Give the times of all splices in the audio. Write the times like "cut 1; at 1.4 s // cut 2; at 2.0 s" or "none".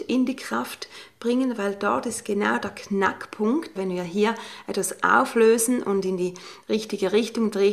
cut 1; at 3.8 s